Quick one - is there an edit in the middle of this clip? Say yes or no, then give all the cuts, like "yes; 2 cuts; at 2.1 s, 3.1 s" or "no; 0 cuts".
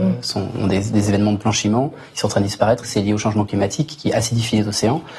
no; 0 cuts